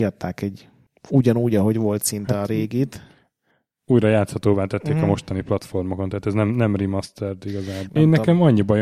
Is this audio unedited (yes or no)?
no